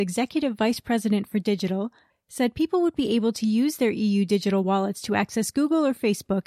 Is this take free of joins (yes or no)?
no